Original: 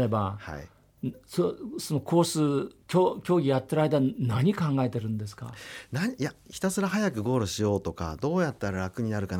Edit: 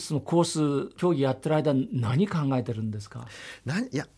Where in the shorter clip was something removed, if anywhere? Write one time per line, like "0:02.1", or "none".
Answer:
0:01.0